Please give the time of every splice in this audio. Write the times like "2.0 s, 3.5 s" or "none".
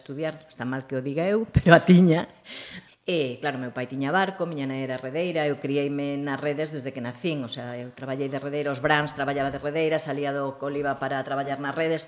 2.9 s